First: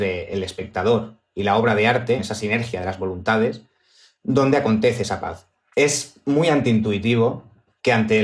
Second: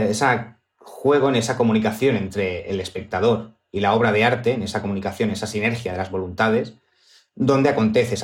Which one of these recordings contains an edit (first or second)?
first